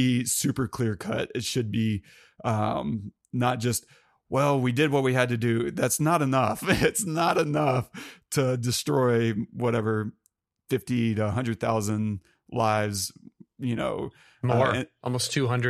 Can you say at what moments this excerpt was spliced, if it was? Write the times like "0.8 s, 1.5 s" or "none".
none